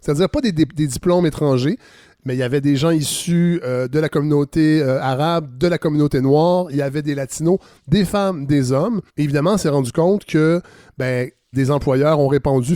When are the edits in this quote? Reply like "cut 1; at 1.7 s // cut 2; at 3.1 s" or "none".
cut 1; at 9.1 s // cut 2; at 11.5 s